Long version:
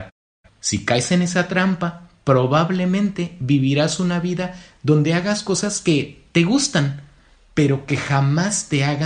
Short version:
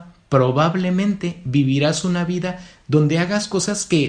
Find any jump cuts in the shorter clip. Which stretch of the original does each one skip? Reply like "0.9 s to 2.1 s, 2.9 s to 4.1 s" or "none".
none